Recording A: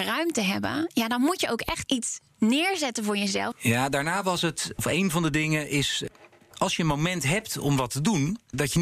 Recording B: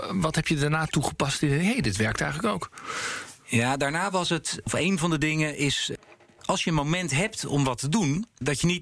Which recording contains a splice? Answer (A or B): A